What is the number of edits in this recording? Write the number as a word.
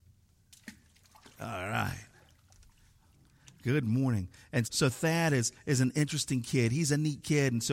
one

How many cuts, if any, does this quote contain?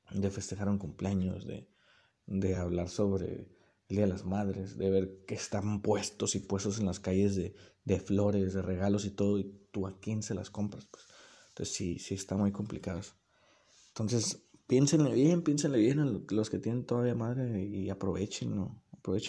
zero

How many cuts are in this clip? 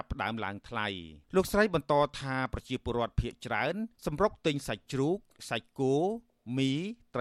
two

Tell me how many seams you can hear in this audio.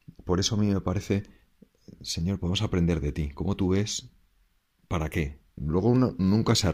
one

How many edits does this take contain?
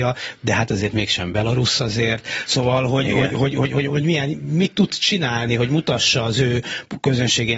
zero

